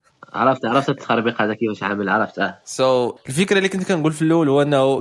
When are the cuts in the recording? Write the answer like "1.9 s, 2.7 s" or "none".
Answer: 3.2 s